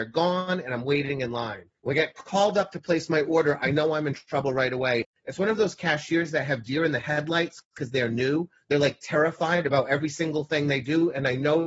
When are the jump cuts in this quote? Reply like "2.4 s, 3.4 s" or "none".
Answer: 1.8 s